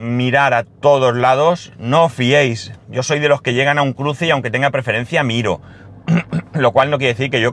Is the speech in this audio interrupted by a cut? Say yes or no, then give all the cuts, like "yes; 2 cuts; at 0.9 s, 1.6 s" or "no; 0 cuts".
no; 0 cuts